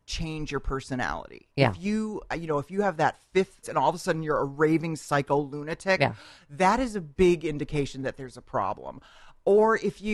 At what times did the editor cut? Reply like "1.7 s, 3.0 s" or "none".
3.6 s